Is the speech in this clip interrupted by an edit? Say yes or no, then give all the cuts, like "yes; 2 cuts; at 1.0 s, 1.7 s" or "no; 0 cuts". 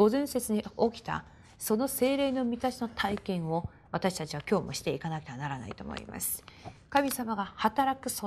no; 0 cuts